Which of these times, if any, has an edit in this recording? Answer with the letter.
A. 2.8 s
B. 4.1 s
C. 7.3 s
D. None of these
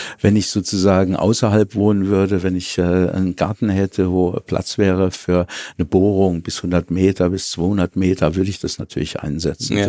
D